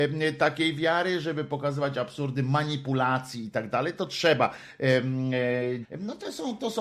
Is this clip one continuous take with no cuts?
no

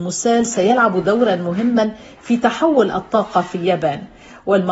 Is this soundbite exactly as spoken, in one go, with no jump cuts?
yes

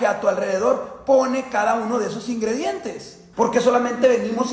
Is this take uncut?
no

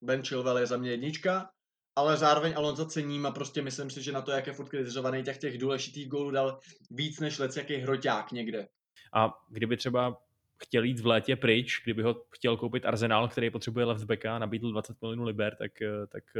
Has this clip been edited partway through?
yes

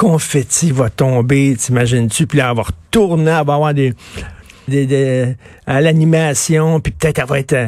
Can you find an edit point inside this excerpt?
yes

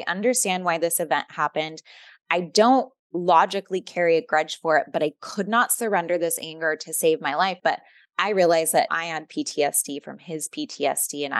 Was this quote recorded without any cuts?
no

